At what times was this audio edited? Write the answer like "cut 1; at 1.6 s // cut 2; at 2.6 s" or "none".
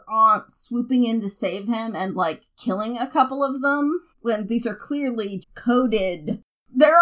cut 1; at 4.1 s // cut 2; at 5.4 s